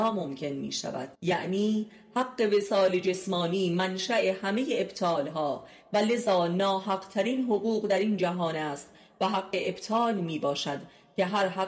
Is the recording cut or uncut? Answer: cut